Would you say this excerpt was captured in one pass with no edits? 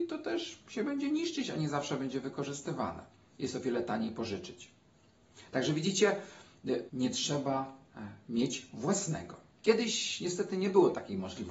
no; 3 cuts; at 5.5 s, 6.9 s, 9.6 s

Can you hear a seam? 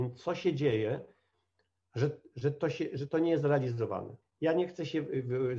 yes; 1 cut; at 4.2 s

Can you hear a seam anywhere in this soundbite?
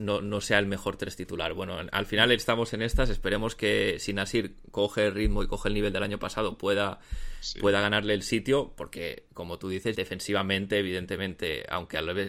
yes; 1 cut; at 9.9 s

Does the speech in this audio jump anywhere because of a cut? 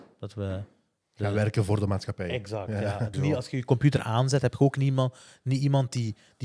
yes; 1 cut; at 3.1 s

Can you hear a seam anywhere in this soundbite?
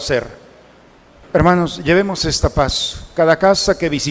yes; 1 cut; at 1.2 s

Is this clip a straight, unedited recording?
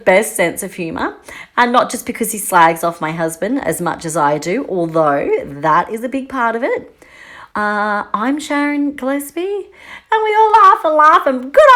no; 1 cut; at 7.5 s

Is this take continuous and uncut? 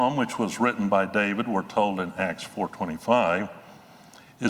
yes; 0 cuts

